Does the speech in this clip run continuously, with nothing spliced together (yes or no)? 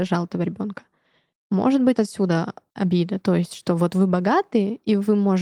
no